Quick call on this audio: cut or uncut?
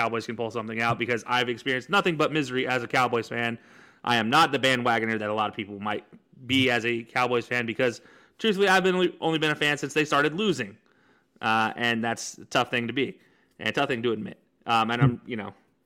uncut